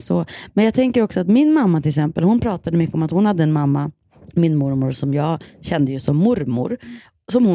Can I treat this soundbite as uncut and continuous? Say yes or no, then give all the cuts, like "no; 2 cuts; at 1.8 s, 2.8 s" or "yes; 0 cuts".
yes; 0 cuts